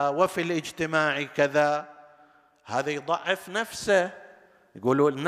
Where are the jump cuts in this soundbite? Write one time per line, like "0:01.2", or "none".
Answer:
none